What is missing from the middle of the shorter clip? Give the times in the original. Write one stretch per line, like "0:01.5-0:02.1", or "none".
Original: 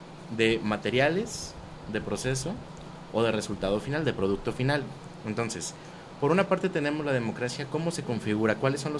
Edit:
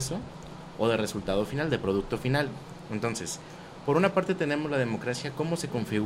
none